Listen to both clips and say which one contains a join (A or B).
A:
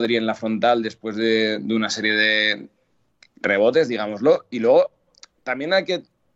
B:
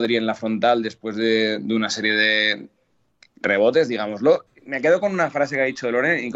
B